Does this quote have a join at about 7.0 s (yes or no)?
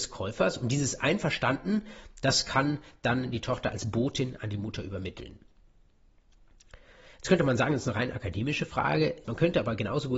no